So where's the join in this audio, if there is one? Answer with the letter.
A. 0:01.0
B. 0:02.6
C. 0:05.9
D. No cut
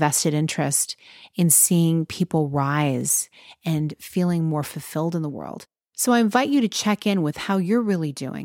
D